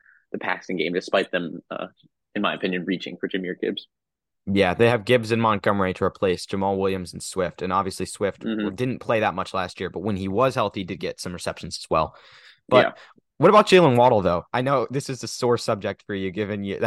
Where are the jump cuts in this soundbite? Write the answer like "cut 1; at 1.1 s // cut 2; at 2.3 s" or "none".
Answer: none